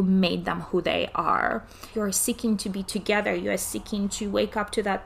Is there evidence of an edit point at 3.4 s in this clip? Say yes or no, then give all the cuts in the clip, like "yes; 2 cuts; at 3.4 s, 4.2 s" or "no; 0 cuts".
no; 1 cut; at 1.9 s